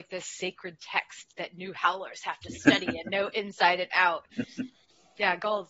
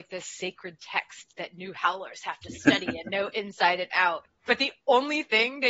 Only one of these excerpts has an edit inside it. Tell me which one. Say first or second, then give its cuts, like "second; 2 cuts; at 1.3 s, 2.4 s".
first; 1 cut; at 4.3 s